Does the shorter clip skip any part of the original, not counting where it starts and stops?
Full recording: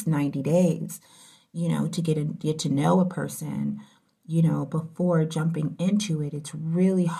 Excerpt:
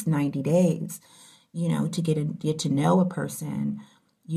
no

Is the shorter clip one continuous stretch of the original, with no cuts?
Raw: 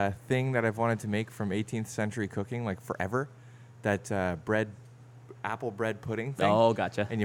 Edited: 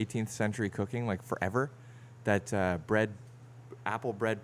yes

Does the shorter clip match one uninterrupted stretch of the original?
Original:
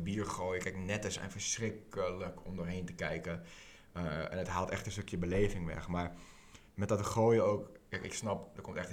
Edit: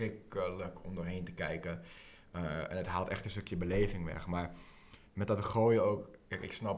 yes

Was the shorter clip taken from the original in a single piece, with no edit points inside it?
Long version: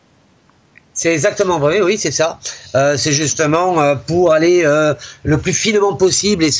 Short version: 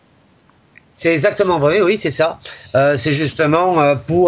yes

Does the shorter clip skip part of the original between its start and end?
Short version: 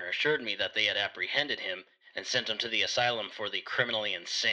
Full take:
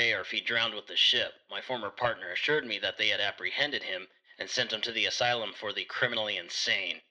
no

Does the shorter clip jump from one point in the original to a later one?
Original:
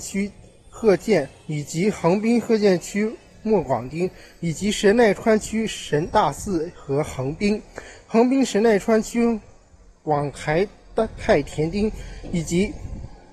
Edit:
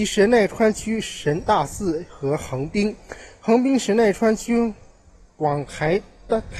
no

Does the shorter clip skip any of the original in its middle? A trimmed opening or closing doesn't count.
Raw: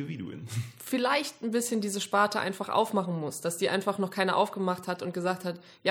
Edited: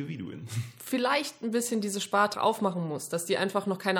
yes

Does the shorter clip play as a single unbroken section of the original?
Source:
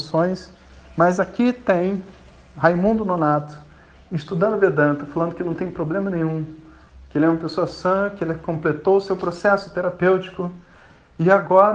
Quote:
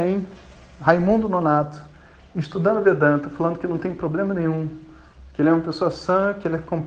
yes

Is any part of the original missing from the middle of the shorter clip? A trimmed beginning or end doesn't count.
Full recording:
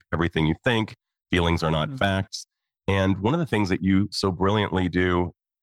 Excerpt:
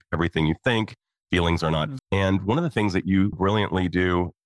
yes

